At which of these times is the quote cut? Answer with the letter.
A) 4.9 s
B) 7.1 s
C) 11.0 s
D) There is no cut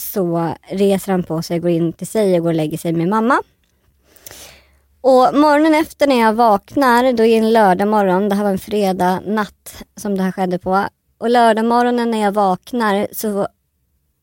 D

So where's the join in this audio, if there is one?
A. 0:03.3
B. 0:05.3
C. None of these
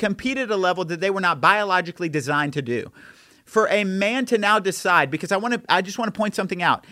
C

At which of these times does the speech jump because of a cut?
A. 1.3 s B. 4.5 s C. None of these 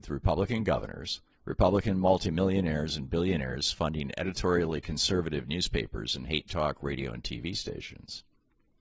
A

